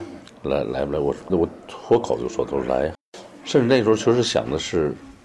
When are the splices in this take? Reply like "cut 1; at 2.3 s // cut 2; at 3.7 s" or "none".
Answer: cut 1; at 1.3 s // cut 2; at 2.9 s